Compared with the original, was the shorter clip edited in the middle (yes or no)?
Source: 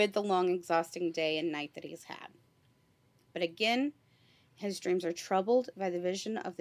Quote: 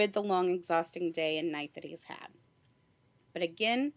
no